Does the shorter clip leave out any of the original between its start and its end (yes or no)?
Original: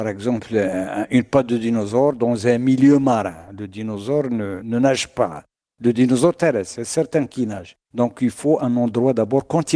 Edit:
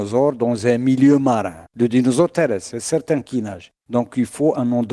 yes